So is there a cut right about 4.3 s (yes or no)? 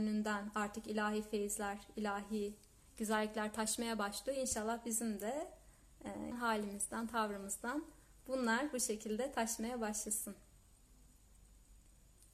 no